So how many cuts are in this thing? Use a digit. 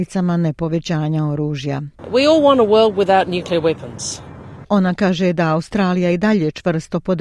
1